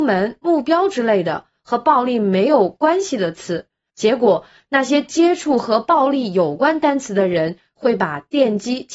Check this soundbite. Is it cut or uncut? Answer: cut